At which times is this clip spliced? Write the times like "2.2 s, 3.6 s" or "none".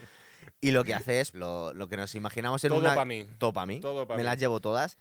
1.3 s